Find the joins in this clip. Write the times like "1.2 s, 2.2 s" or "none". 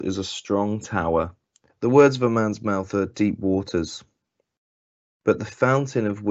1.7 s